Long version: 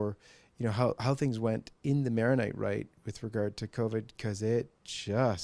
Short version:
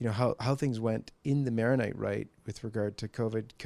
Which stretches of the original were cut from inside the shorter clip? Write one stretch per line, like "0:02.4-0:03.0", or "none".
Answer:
none